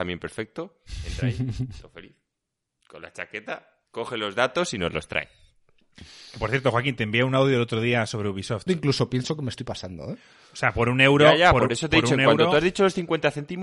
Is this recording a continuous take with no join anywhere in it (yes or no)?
no